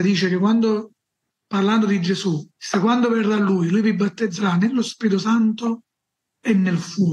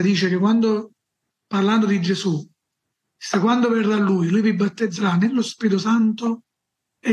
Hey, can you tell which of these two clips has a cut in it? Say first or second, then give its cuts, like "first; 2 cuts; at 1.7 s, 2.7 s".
first; 1 cut; at 2.5 s